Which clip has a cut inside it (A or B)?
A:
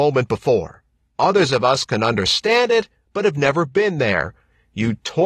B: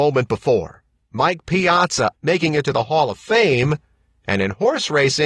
B